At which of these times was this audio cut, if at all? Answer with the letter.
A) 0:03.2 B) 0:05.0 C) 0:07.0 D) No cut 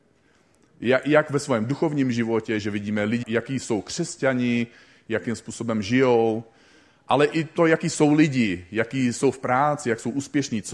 A